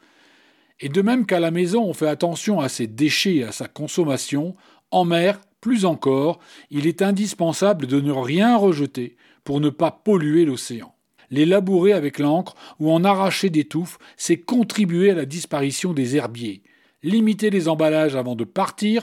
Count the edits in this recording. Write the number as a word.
two